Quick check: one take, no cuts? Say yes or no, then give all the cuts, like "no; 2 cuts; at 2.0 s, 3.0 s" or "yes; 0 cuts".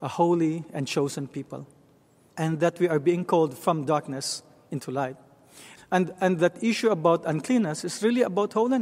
no; 2 cuts; at 2.3 s, 5.8 s